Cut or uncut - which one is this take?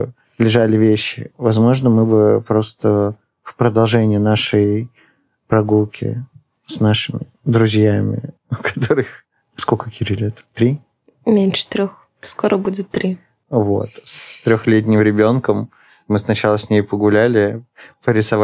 uncut